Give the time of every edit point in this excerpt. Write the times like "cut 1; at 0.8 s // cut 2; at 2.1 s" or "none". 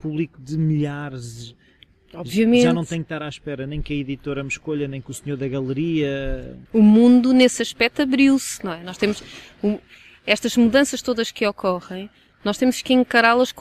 cut 1; at 6.7 s